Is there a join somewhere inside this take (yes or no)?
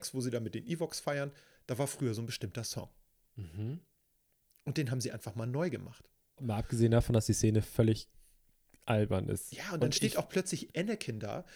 yes